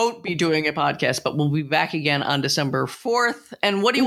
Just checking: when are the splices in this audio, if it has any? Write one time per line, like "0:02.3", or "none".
none